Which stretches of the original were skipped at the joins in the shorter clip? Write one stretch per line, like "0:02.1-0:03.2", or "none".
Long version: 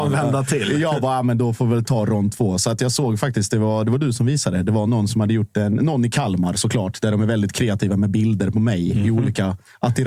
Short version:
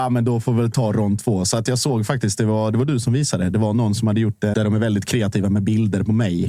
0:05.7-0:07.0